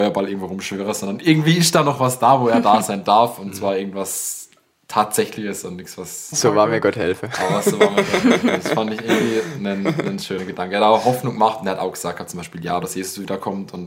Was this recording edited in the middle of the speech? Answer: yes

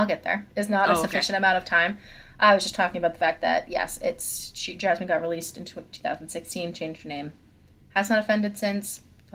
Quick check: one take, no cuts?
yes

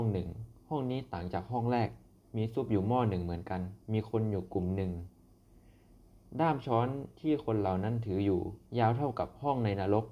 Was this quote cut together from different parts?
yes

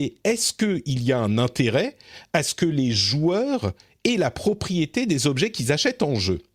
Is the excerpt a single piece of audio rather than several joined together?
yes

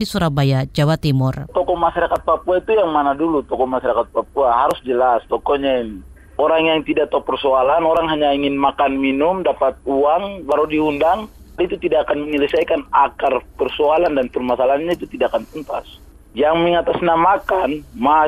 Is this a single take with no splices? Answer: no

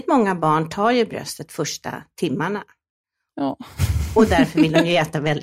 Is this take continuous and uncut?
no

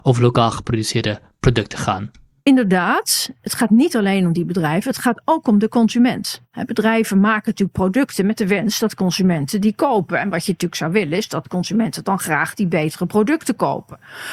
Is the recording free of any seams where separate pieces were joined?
yes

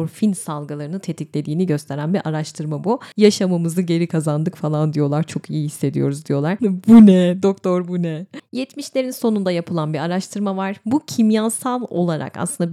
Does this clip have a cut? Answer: yes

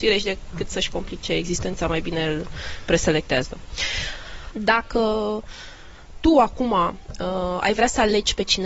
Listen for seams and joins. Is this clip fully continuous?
no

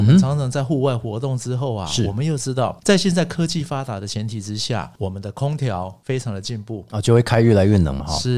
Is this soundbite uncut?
yes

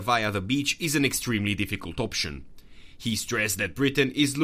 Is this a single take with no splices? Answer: yes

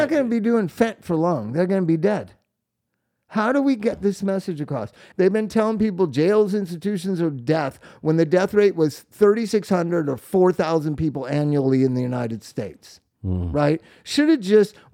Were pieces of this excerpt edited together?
yes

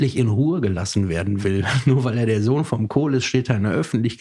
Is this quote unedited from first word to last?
yes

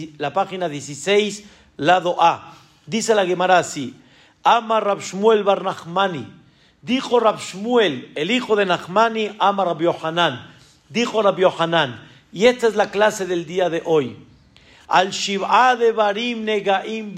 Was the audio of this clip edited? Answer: no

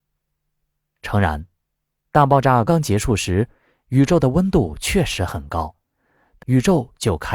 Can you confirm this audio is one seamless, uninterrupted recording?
no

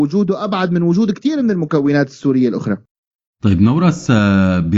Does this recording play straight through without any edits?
yes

